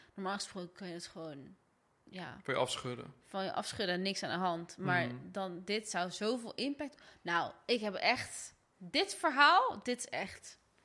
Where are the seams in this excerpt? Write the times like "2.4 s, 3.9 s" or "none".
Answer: none